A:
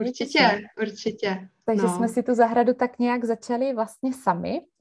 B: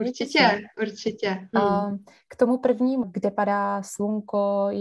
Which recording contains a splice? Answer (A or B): B